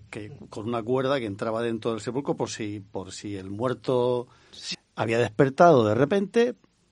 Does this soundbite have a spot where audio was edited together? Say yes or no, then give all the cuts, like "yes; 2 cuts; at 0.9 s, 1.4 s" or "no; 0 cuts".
yes; 1 cut; at 4.7 s